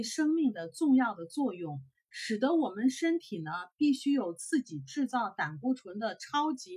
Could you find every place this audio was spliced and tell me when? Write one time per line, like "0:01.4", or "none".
none